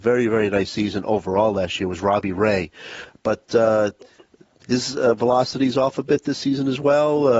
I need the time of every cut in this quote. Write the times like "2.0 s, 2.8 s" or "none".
none